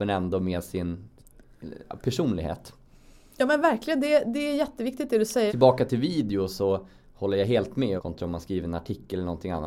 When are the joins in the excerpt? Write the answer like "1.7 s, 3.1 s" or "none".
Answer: 5.5 s, 8.0 s